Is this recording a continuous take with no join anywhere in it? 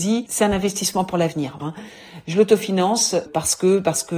no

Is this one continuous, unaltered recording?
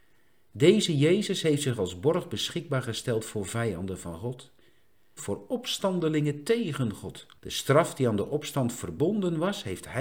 no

